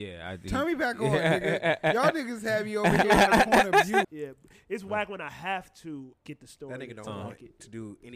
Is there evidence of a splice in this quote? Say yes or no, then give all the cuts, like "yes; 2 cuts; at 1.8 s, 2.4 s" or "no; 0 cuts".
yes; 2 cuts; at 4.0 s, 6.1 s